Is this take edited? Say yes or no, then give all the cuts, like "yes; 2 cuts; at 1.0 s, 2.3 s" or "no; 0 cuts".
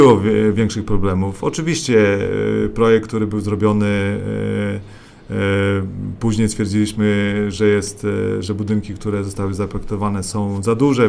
no; 0 cuts